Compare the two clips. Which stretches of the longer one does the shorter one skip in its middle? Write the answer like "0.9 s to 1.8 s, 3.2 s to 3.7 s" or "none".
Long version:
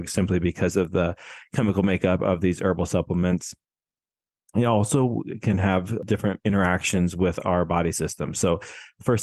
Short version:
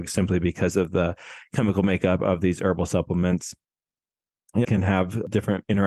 4.6 s to 5.4 s